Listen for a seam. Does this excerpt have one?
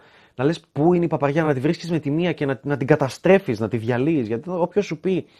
no; 0 cuts

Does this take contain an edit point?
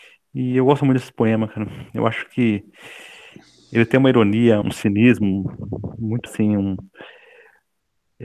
yes; 2 cuts; at 4.6 s, 6.3 s

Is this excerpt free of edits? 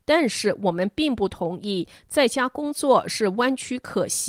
yes; 0 cuts

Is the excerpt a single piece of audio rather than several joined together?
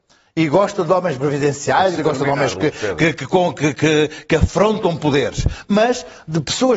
no; 1 cut; at 2.0 s

